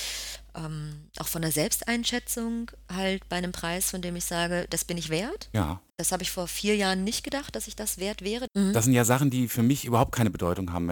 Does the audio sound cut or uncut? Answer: cut